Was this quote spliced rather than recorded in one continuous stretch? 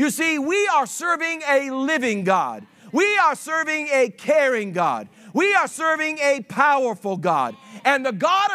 no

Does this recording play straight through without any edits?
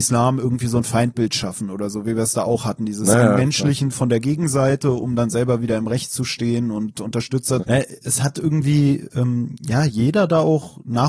no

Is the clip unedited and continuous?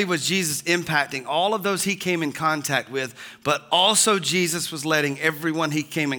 yes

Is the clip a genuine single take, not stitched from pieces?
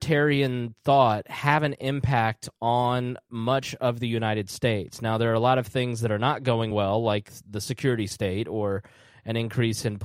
yes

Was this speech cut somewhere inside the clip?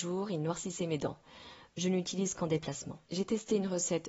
yes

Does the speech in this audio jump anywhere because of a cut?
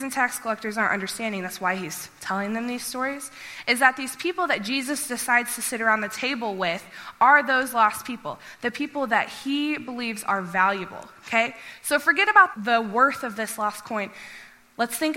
yes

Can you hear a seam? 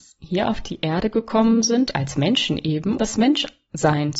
yes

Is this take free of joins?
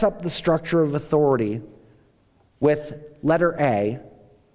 yes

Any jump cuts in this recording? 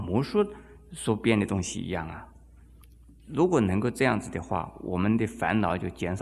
no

